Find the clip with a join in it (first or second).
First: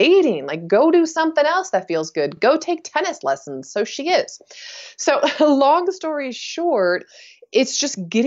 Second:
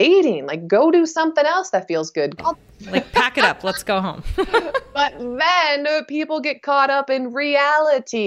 second